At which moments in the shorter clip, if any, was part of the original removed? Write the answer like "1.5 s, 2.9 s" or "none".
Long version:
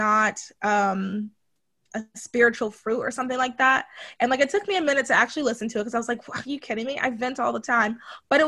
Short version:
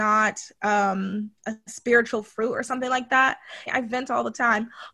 1.4 s, 3.7 s